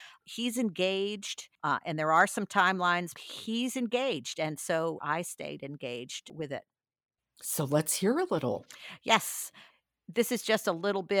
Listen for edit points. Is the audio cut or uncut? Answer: cut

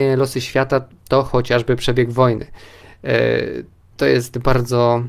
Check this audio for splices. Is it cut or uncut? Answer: uncut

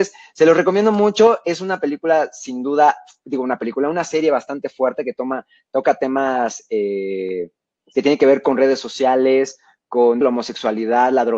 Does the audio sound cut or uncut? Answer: cut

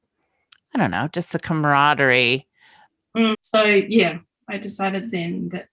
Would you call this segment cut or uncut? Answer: cut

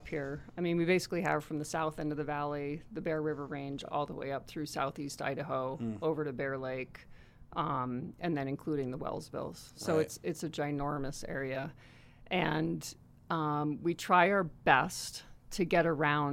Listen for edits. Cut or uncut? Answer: uncut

